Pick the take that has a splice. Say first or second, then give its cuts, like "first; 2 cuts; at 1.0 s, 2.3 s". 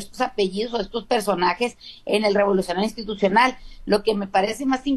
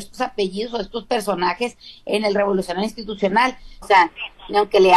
second; 1 cut; at 3.8 s